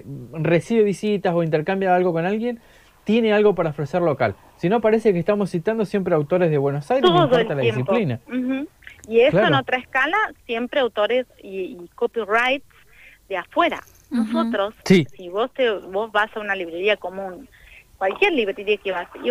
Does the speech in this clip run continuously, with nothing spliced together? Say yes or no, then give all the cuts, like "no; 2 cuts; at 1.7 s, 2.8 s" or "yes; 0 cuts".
yes; 0 cuts